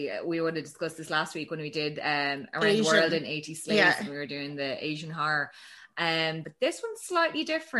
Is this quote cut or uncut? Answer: cut